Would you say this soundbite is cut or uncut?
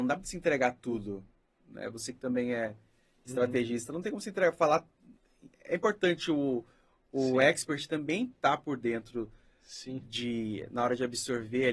uncut